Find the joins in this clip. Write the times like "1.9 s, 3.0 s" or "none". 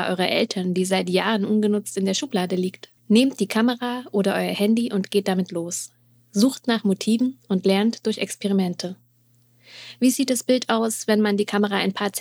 3.0 s